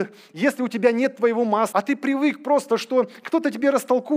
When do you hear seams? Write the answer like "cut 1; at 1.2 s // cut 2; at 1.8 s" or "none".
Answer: cut 1; at 1.7 s